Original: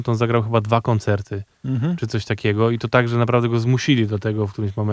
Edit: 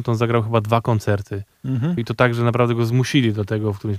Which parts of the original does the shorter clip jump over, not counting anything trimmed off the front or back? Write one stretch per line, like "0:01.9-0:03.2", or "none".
0:02.0-0:02.7